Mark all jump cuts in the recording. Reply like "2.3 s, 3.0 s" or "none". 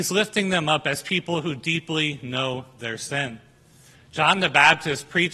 3.9 s